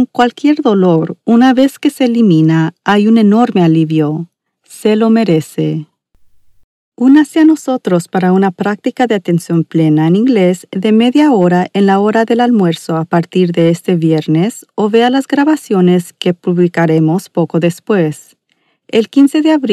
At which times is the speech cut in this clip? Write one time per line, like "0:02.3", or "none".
none

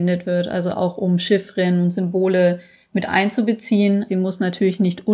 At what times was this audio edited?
0:04.1

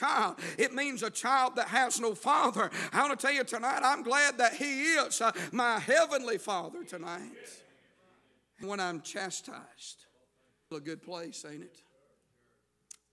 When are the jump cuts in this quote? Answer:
0:08.6
0:10.7

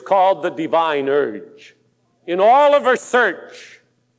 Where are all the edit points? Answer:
0:02.0

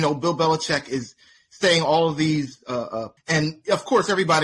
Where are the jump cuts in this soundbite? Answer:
0:03.2

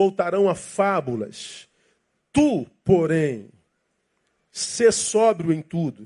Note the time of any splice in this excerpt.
none

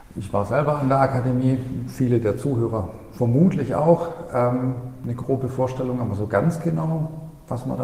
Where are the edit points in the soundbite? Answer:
none

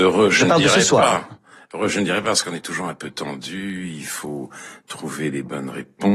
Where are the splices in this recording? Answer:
none

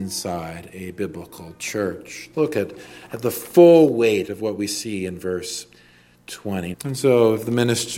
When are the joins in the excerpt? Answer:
0:02.3
0:06.7

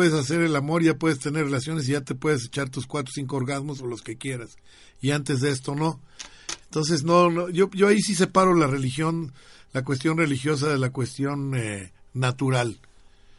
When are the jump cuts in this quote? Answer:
none

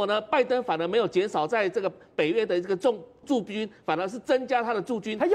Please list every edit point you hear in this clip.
0:03.2

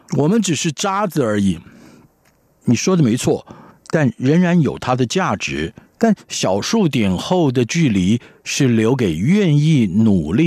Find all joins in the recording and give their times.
0:03.7
0:05.9

